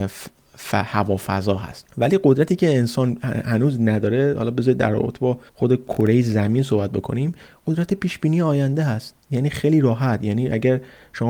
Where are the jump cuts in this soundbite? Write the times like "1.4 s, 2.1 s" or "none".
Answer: 1.9 s, 5.5 s, 9.2 s